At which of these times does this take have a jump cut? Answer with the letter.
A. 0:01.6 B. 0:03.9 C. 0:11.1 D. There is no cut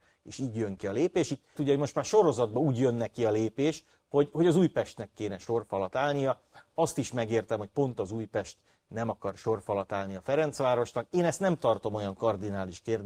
A